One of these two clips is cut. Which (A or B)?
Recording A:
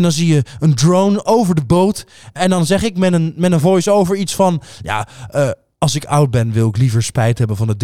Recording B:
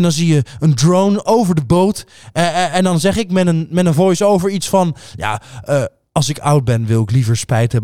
A